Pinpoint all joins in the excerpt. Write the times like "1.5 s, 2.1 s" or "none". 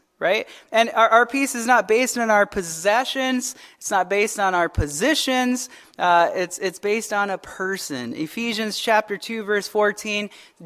none

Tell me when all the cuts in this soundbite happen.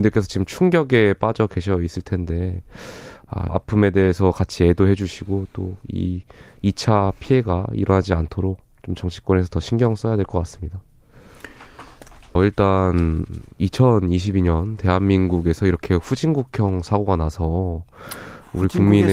3.5 s, 12.4 s

